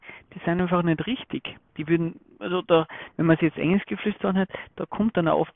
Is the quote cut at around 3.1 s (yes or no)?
no